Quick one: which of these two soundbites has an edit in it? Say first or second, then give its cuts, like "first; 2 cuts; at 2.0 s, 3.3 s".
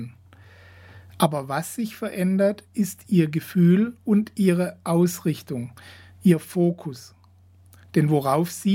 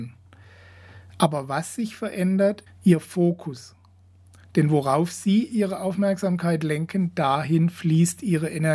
second; 1 cut; at 2.7 s